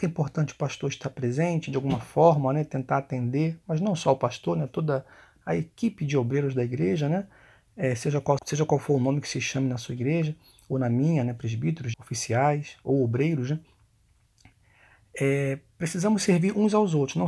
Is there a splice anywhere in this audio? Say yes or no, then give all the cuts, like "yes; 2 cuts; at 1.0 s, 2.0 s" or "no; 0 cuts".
yes; 2 cuts; at 8.4 s, 11.9 s